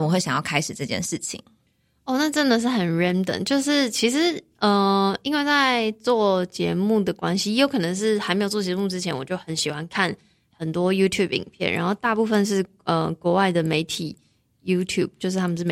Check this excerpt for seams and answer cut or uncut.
uncut